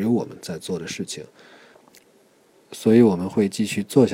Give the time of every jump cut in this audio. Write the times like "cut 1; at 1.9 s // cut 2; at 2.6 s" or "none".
none